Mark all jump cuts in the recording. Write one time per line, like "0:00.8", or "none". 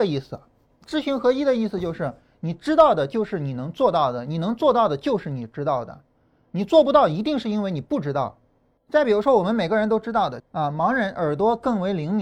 0:08.8
0:10.4